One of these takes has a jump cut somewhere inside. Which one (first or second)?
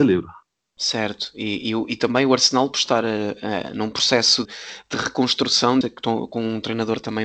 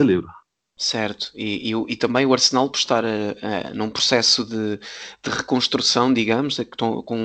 first